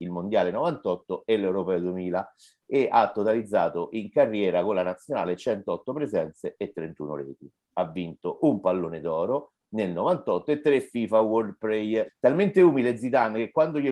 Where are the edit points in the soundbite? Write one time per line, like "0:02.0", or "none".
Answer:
0:12.1